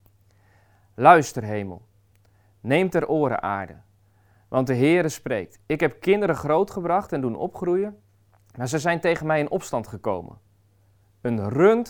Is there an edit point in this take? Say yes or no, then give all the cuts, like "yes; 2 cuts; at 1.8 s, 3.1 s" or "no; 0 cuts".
no; 0 cuts